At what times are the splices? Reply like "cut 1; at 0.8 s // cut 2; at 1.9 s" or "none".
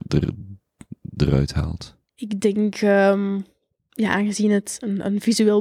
cut 1; at 2.1 s